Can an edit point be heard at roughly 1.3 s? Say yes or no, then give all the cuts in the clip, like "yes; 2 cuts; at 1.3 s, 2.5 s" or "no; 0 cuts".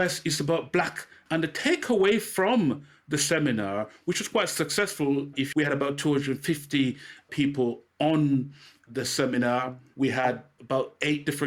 yes; 3 cuts; at 1.3 s, 5.5 s, 9.9 s